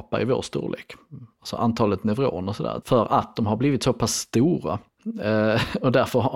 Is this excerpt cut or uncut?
cut